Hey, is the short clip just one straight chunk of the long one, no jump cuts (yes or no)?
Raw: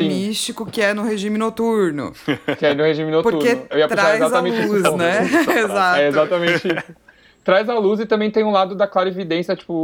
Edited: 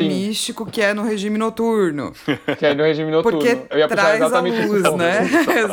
yes